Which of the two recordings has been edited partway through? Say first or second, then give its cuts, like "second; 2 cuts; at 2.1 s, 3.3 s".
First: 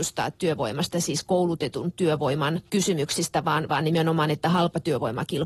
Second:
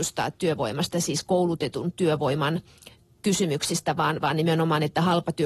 first; 1 cut; at 2.7 s